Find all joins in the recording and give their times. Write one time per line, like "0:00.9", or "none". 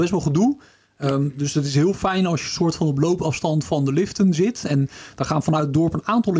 none